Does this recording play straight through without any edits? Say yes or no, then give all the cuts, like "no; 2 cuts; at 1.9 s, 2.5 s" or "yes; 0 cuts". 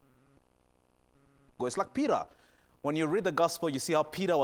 no; 1 cut; at 1.6 s